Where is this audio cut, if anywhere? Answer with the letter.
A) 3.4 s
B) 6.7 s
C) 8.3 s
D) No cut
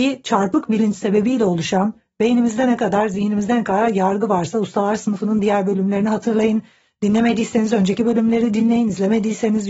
D